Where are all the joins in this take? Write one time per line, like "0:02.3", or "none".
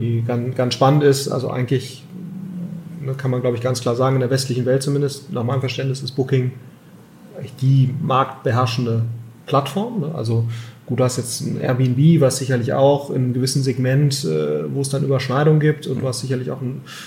none